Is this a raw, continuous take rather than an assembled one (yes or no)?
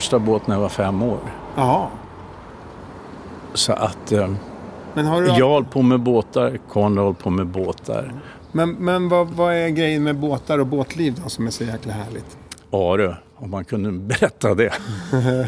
yes